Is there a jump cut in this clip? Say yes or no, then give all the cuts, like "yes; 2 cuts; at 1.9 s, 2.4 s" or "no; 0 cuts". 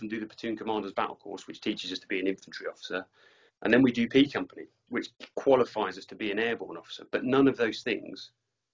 yes; 1 cut; at 4.9 s